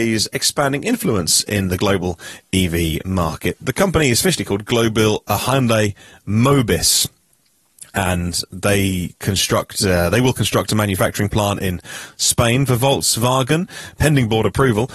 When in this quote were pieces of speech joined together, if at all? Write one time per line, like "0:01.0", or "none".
none

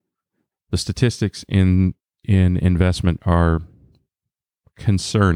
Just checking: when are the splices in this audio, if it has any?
none

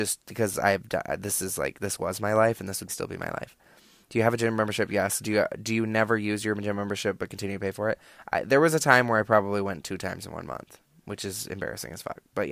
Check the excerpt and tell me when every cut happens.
0:02.9

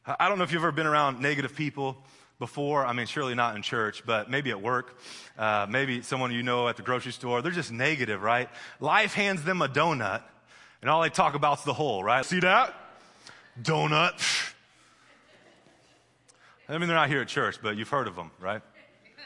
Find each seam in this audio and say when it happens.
0:12.2

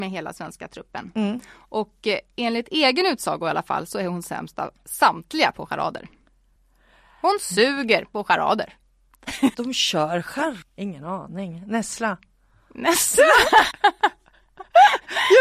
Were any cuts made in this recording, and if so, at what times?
0:09.5
0:10.6
0:13.7

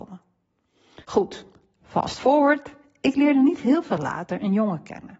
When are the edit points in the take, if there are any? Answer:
0:01.0

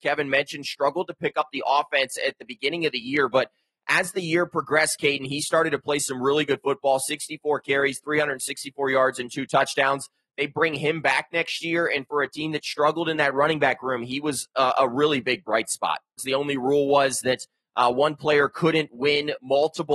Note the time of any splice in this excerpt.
0:16.2

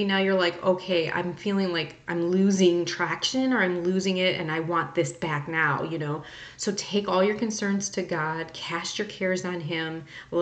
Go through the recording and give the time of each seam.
none

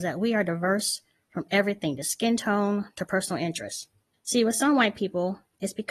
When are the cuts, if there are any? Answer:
0:04.1

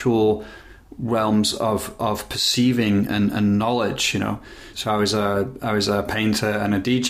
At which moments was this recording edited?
0:04.7

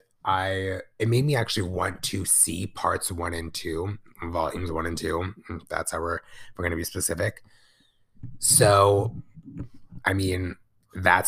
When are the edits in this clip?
none

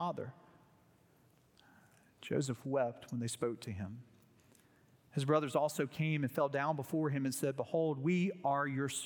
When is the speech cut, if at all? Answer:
none

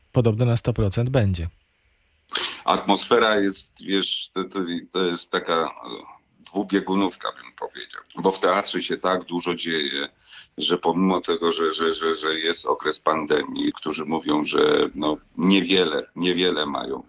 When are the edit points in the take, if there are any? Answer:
0:08.1
0:13.7

